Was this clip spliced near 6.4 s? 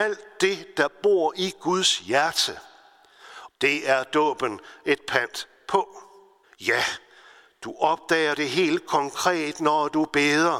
yes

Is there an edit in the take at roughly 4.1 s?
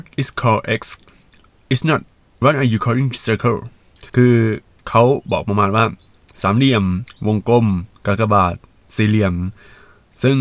yes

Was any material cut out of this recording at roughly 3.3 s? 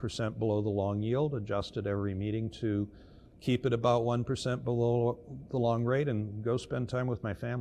no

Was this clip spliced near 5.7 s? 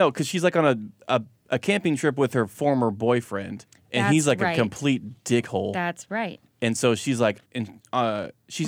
no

